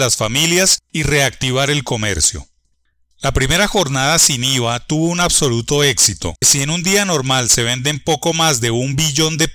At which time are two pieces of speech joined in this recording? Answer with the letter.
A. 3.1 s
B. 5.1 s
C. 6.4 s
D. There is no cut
C